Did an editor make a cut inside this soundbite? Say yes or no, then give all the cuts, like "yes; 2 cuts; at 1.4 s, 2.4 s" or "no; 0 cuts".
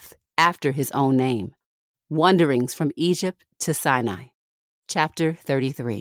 no; 0 cuts